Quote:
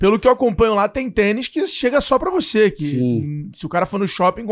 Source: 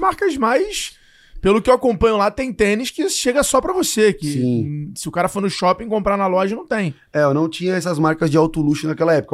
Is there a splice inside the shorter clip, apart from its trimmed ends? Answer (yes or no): no